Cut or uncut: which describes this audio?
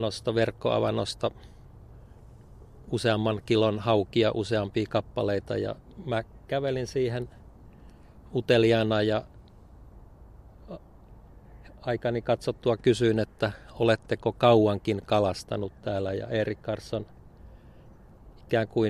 uncut